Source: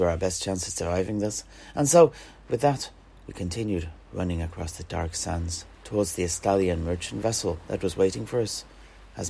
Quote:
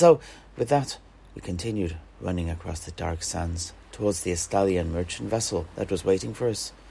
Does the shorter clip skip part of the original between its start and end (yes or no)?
no